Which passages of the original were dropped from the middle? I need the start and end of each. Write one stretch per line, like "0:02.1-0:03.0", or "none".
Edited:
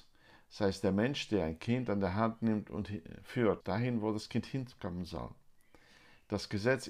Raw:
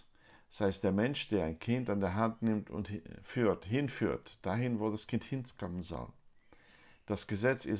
0:03.6-0:04.4